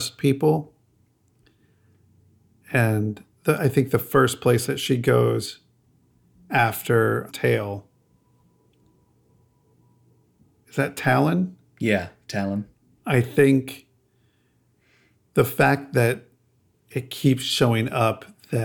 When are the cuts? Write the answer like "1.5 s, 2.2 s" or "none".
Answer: 7.3 s, 13.0 s